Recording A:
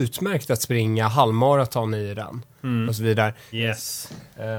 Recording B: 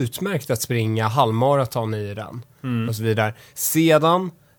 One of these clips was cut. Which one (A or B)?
A